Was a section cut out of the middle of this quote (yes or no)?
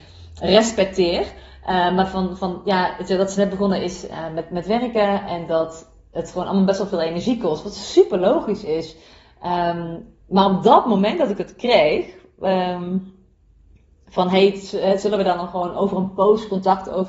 no